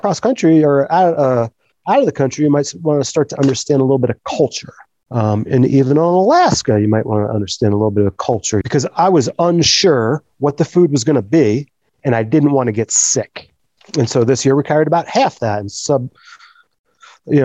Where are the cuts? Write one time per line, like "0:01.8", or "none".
0:08.6